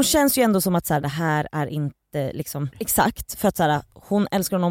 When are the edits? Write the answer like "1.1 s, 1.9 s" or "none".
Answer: 1.0 s, 2.7 s